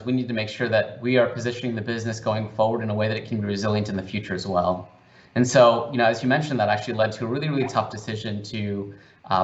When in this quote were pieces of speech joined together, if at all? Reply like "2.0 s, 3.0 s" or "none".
none